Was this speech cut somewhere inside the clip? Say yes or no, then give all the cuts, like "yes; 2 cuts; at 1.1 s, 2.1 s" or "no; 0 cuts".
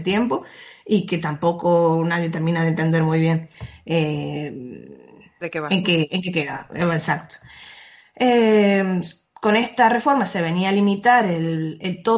no; 0 cuts